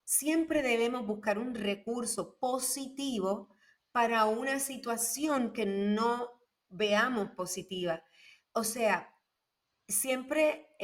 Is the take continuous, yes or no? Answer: yes